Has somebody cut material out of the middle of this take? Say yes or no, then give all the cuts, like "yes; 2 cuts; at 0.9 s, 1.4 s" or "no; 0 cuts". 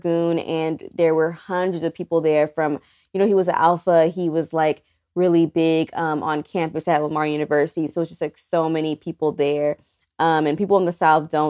no; 0 cuts